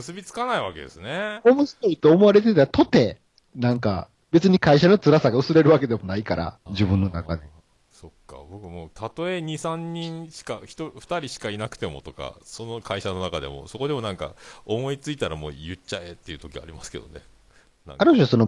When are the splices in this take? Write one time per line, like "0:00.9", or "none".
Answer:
0:06.7